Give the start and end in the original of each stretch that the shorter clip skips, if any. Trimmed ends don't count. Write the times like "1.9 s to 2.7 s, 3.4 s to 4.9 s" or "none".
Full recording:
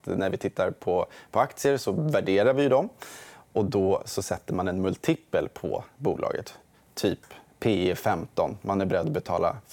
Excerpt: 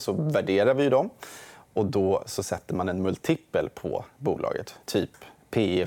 6.6 s to 6.9 s